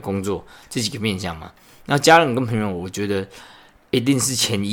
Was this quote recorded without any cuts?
yes; 0 cuts

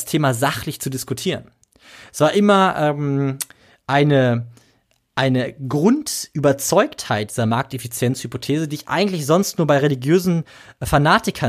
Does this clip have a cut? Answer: no; 0 cuts

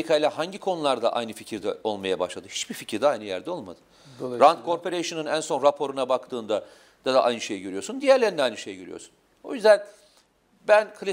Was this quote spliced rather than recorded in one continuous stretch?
no; 0 cuts

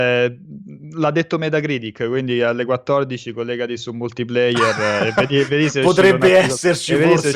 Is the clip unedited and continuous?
yes; 0 cuts

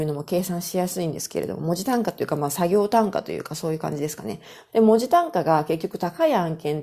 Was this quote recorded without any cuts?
no; 1 cut; at 4.7 s

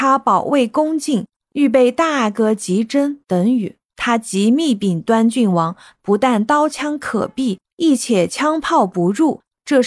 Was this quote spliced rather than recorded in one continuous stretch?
yes; 2 cuts; at 3.9 s, 6.0 s

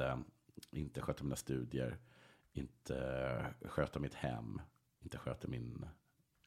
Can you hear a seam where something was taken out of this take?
no; 0 cuts

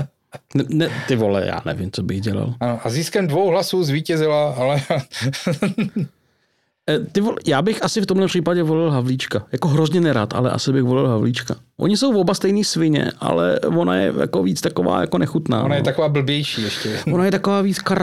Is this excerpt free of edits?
yes; 0 cuts

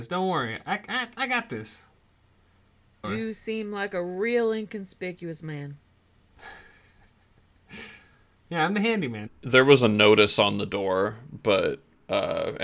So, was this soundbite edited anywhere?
yes; 2 cuts; at 3.0 s, 9.3 s

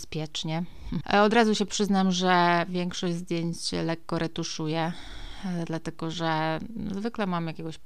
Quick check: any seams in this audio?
yes; 1 cut; at 1.0 s

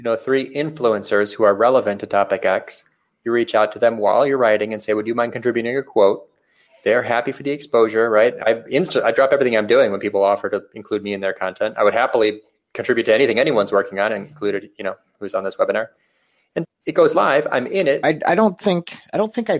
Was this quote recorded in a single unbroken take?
no; 2 cuts; at 16.6 s, 18.0 s

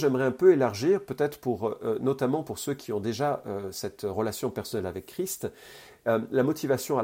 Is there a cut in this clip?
no; 0 cuts

